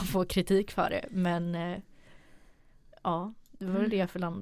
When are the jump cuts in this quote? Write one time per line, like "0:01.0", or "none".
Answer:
none